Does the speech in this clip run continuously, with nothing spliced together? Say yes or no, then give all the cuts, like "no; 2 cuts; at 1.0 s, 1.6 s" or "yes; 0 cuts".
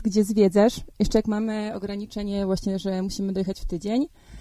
yes; 0 cuts